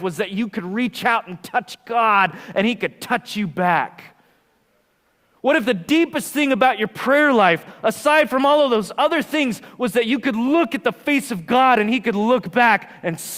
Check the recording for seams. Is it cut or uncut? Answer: uncut